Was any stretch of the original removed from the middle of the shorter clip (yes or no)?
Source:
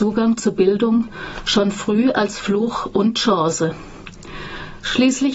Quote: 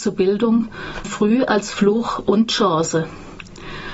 yes